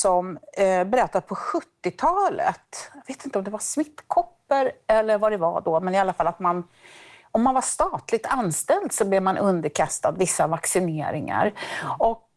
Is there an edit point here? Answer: no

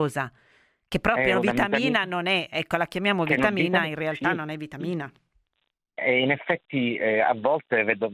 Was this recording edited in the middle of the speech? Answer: no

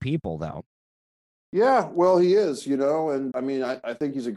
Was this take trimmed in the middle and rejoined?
yes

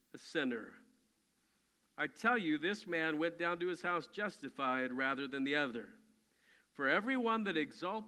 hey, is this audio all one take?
yes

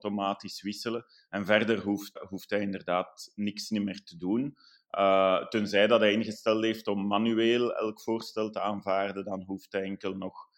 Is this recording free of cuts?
no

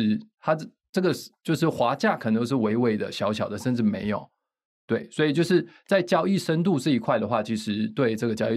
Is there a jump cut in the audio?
no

